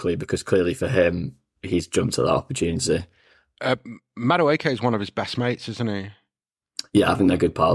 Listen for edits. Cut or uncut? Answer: uncut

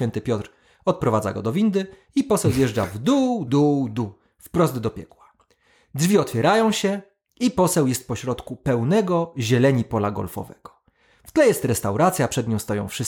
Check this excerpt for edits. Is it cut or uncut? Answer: cut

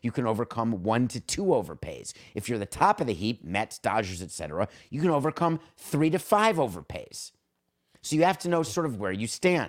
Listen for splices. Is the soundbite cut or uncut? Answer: uncut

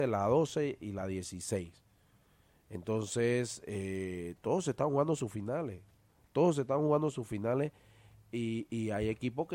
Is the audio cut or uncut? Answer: uncut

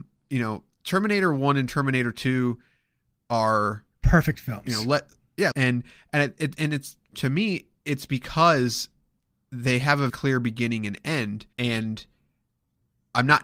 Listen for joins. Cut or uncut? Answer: cut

